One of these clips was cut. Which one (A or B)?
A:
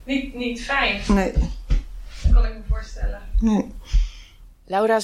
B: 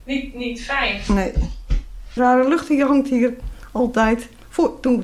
B